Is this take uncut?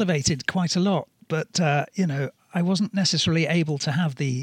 yes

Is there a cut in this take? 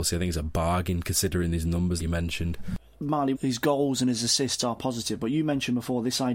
yes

